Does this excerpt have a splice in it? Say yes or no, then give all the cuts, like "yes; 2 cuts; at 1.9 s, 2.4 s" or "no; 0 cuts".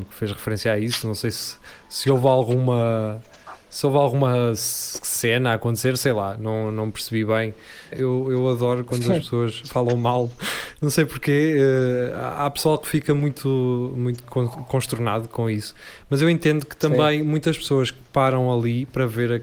yes; 1 cut; at 7.9 s